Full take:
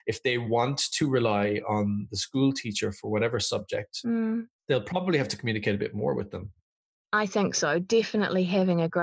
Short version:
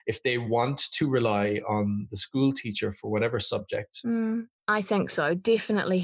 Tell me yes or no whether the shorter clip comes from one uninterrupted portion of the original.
no